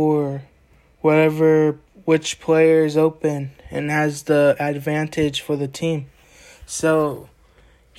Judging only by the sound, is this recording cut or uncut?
uncut